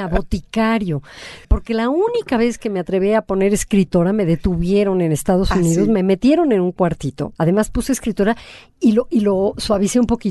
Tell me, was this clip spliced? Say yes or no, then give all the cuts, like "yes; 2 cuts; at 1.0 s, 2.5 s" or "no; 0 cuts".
yes; 2 cuts; at 1.4 s, 7.3 s